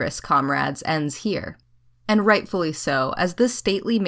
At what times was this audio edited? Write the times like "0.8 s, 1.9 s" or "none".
2.0 s